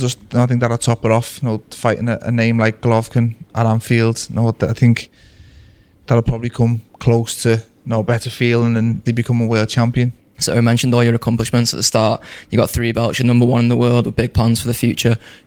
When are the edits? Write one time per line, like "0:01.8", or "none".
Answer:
0:09.1
0:10.2